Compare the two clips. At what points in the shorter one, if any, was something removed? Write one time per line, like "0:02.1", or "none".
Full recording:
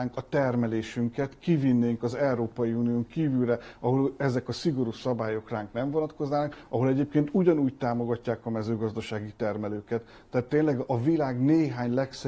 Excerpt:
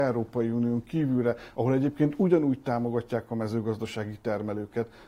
0:01.5